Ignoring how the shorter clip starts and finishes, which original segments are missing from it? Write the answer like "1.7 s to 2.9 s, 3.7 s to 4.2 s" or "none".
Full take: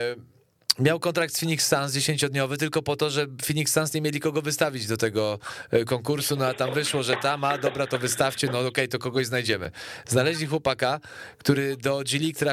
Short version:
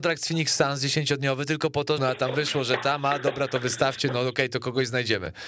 3.1 s to 6.4 s

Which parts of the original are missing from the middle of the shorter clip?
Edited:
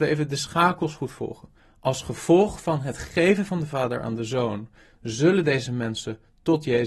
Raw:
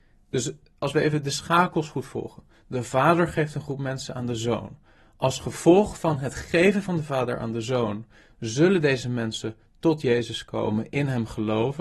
2.5 s to 5.0 s

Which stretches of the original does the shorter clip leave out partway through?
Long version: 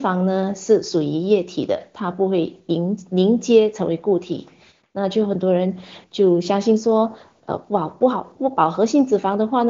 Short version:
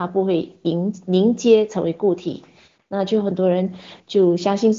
none

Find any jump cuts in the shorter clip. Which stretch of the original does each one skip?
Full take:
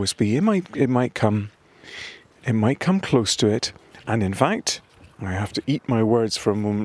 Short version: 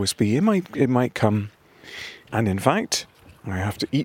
2.3 s to 4.0 s

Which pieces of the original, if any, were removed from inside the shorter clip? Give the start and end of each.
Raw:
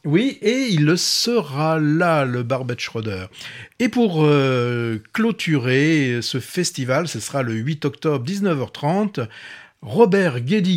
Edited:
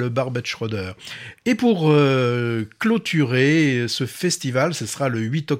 none

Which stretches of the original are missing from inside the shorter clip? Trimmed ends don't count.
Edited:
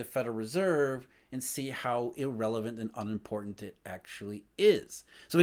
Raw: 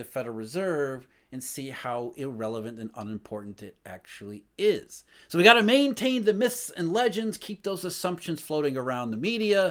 none

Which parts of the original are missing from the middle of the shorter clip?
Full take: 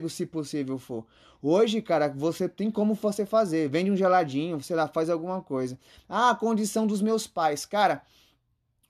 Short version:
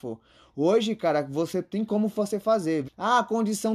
3.7 s to 6.0 s

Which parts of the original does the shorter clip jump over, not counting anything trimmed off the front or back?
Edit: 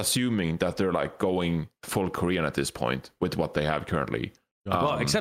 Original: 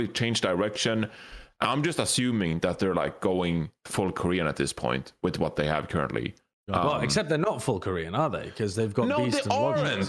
none

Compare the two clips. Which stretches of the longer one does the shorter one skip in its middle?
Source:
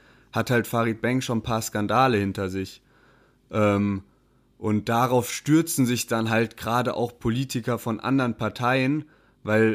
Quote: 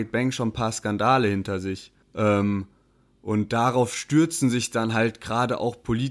2.9 s to 3.4 s

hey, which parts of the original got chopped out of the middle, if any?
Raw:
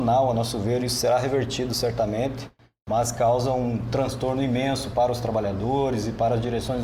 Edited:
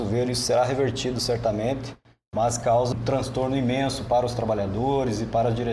3.5 s to 3.8 s

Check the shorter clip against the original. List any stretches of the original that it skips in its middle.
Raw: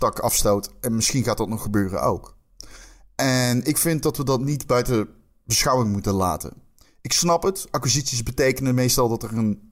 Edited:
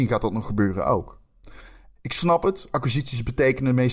3.1 s to 7.0 s

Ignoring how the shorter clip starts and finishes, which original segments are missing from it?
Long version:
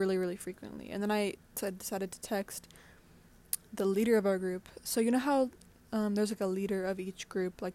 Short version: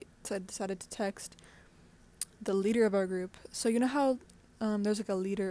none

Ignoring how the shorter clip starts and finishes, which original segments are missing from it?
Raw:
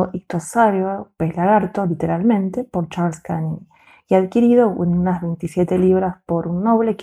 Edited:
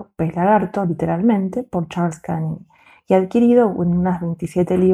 none

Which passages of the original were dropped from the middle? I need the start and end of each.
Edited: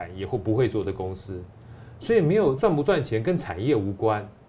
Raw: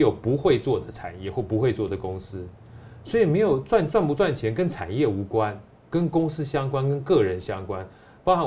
3.6 s to 3.9 s

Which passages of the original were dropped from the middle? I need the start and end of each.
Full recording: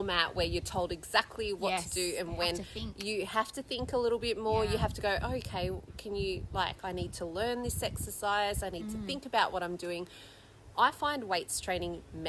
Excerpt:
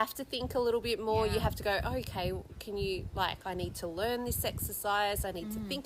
none

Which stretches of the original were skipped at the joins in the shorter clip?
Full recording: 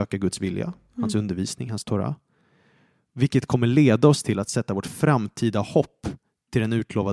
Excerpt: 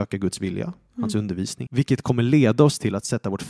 1.7 s to 3.1 s

